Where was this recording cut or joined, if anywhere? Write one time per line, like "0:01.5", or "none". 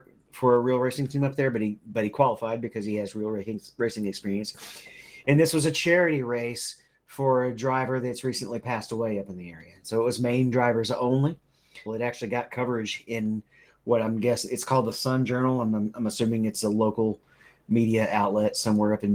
0:11.9